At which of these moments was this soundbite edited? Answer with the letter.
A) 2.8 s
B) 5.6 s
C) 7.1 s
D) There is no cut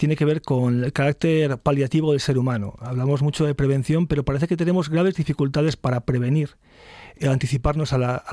D